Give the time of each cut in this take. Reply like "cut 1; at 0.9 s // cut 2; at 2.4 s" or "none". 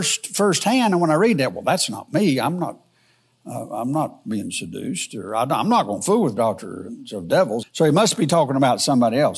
cut 1; at 7.6 s